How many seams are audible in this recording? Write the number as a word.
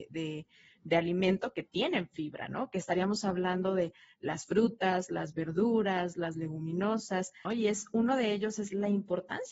one